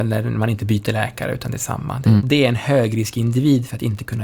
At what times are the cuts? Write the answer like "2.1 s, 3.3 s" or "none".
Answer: 2.2 s